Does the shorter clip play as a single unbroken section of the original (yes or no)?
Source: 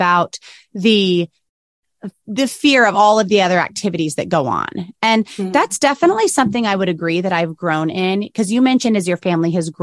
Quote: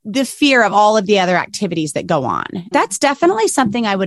no